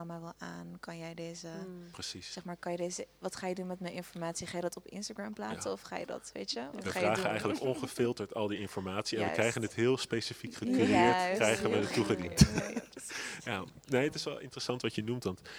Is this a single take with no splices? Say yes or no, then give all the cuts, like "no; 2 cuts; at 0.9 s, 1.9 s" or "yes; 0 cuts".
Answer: yes; 0 cuts